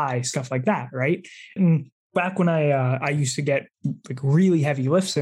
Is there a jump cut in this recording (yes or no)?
yes